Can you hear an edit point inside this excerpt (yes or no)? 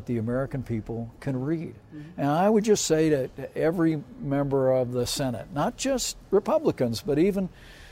no